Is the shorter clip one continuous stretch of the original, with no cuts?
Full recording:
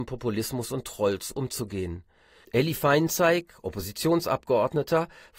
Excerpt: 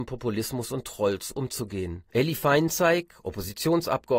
no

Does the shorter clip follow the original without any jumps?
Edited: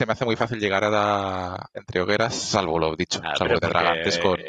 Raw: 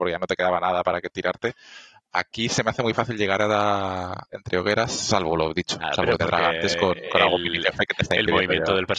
yes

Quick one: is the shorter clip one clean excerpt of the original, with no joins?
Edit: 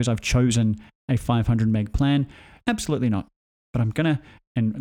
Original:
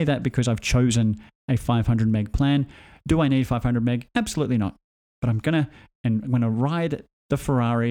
no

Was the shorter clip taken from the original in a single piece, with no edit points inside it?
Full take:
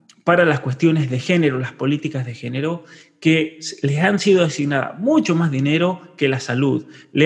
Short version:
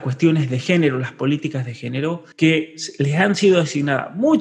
no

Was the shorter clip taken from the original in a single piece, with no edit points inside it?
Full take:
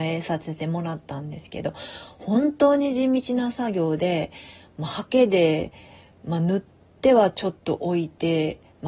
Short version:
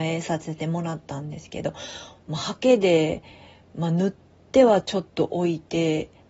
no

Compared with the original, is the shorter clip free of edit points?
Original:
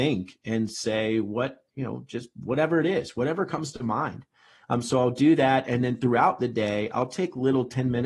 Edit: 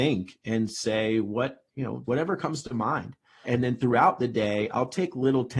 no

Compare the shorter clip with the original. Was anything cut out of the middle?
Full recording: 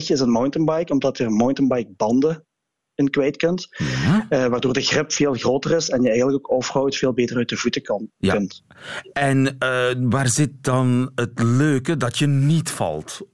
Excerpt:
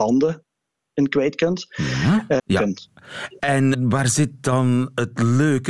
yes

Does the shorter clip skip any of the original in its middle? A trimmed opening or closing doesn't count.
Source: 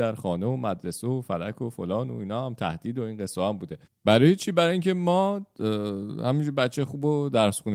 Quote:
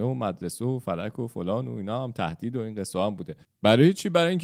no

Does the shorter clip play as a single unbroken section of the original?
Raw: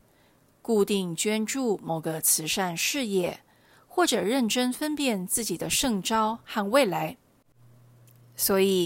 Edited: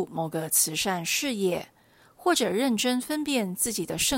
yes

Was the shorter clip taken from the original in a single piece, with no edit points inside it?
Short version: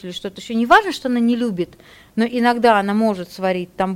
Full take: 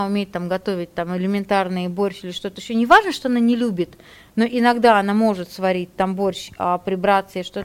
yes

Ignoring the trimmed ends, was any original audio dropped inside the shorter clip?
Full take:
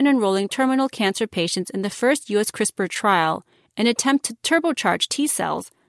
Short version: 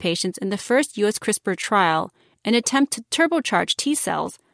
no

